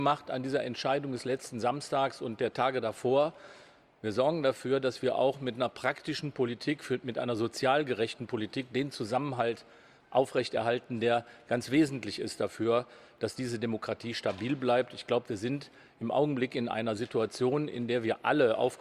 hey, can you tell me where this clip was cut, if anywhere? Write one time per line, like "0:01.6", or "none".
none